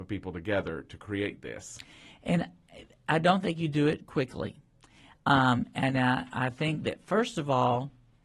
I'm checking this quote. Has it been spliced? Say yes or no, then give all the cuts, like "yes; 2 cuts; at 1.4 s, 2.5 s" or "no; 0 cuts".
no; 0 cuts